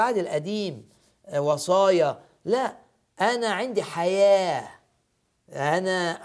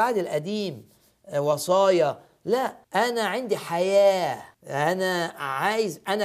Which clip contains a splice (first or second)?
second